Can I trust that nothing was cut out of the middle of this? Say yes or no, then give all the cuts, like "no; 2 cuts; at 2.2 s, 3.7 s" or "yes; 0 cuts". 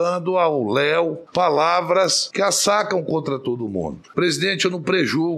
yes; 0 cuts